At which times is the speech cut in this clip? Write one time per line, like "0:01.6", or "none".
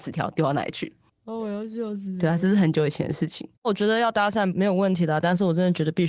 0:03.6